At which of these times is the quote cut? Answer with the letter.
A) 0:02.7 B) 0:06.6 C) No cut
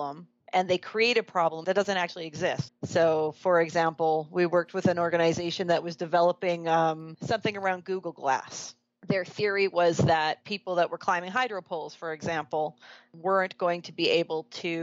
A